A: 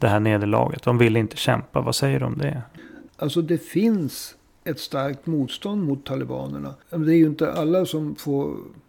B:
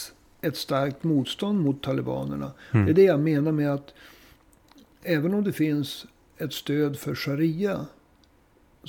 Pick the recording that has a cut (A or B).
A